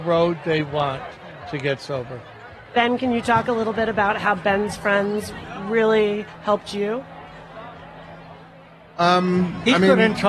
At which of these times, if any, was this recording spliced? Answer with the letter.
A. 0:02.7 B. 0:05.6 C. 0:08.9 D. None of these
D